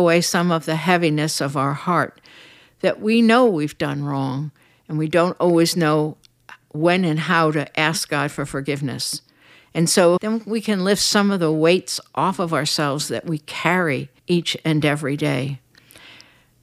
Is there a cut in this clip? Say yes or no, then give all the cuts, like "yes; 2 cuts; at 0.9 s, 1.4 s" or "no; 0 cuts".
yes; 2 cuts; at 10.2 s, 14.2 s